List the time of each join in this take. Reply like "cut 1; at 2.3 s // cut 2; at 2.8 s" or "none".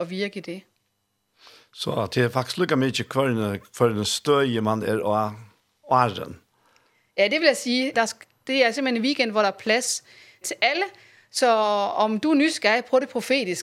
cut 1; at 7.9 s // cut 2; at 10.4 s